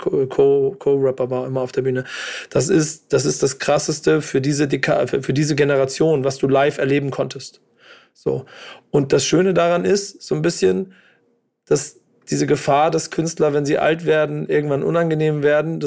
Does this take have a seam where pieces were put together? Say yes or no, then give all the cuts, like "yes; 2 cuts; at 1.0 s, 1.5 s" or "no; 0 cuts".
no; 0 cuts